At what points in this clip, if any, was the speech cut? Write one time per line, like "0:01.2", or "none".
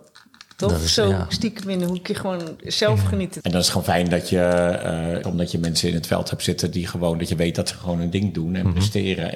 0:03.4
0:05.2